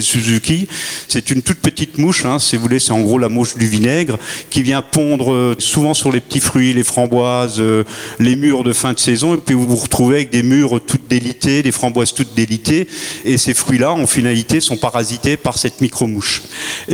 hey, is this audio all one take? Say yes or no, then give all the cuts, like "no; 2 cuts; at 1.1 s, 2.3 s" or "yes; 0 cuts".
yes; 0 cuts